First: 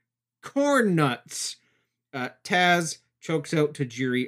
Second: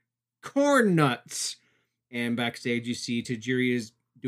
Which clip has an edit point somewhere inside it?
second; 1 cut; at 2.0 s

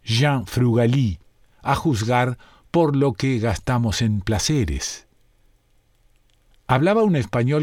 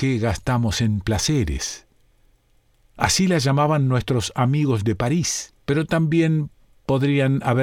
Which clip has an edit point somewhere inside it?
second; 2 cuts; at 3.0 s, 5.6 s

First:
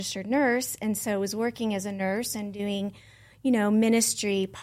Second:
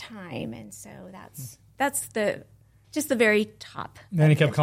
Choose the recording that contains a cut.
second; 1 cut; at 2.8 s

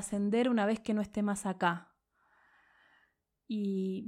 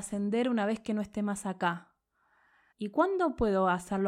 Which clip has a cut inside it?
second; 1 cut; at 2.7 s

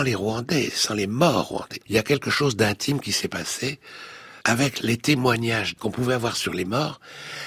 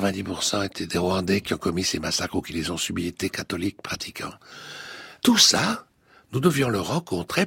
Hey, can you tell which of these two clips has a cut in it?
first; 2 cuts; at 1.8 s, 4.4 s

